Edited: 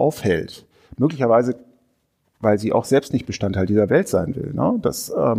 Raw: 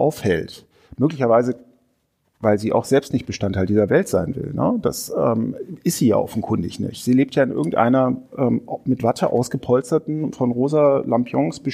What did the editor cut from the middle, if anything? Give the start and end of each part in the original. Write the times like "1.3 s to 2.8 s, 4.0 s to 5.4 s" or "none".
none